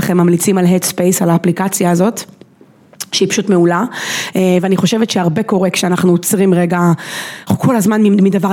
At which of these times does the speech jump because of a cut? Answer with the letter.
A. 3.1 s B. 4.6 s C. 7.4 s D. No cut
D